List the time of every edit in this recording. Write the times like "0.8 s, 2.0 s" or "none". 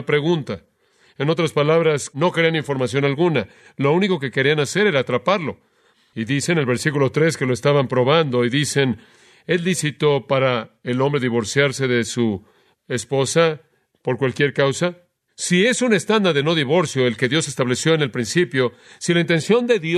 2.1 s, 15.3 s

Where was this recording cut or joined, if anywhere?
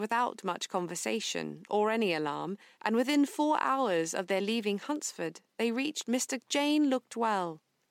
6.4 s

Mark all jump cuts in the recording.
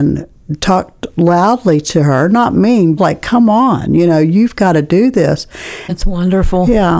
3.0 s, 5.9 s

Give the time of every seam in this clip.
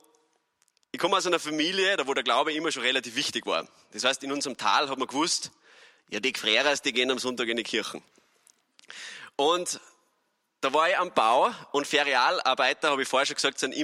none

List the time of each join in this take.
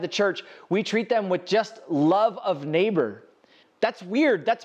3.6 s

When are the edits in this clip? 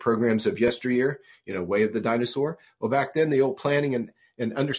none

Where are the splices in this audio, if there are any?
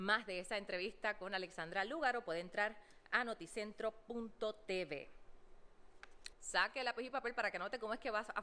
6.3 s

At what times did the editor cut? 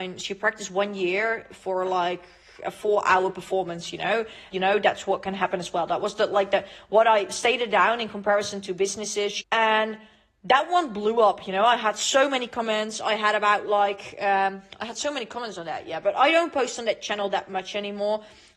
4.5 s, 9.4 s

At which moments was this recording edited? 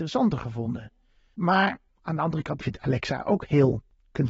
1.3 s, 2.6 s

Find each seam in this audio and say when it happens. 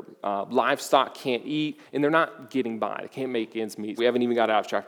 4.0 s

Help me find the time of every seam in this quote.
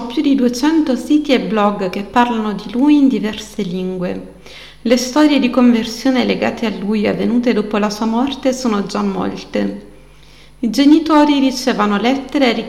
none

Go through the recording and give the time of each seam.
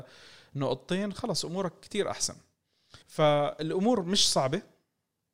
3.0 s

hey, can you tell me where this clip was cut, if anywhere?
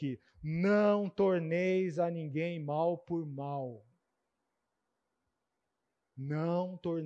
none

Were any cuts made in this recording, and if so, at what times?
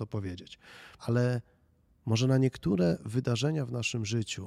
1.0 s

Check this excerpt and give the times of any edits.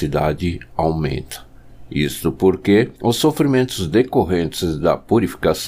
3.0 s

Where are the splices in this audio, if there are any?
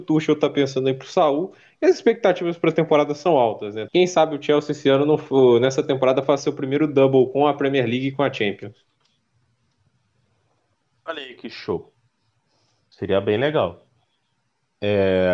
3.9 s

